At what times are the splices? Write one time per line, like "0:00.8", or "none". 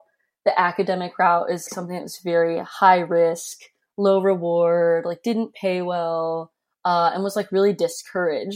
0:01.7